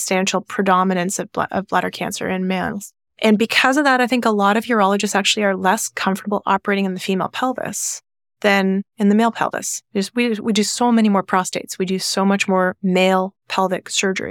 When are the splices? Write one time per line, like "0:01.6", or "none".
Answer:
none